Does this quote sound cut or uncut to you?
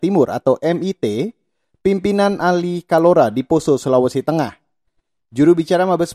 uncut